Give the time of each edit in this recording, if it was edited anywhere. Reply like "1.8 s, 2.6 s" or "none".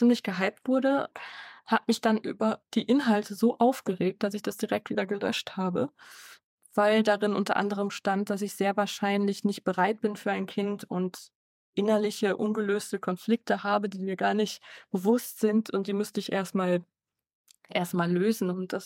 none